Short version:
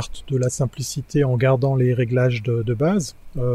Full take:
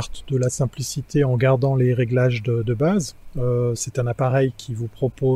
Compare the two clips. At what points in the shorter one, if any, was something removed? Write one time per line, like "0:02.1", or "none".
none